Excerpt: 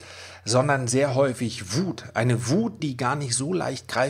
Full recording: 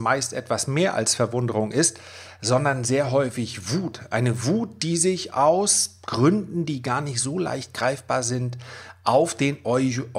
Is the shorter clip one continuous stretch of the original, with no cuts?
no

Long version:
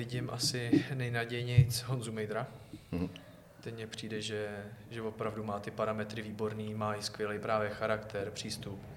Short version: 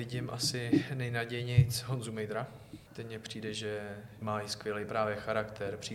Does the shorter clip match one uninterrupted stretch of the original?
no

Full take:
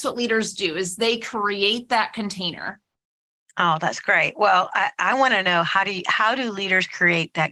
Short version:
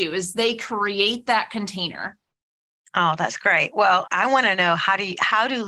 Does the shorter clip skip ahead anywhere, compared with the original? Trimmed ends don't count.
yes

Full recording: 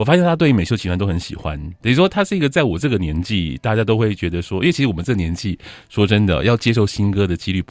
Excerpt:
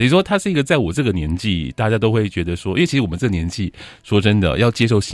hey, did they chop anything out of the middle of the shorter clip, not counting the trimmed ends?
no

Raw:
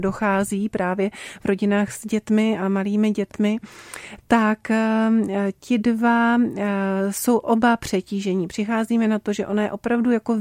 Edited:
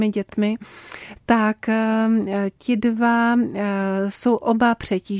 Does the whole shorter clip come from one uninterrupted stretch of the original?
yes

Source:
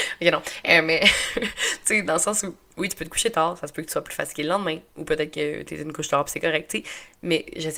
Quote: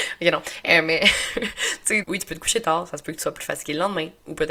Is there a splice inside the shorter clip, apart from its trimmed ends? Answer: yes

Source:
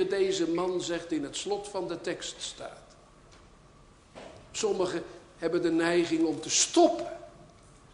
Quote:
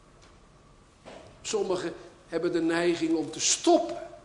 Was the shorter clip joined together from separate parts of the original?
no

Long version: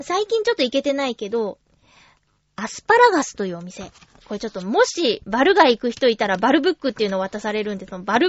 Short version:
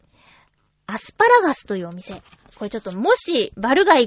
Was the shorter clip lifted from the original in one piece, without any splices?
yes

